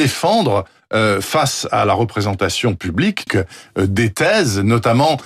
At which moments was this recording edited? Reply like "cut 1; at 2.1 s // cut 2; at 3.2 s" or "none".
cut 1; at 3.3 s